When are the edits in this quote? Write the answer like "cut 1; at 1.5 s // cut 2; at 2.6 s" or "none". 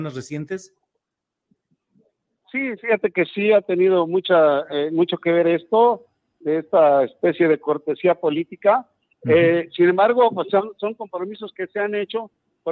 none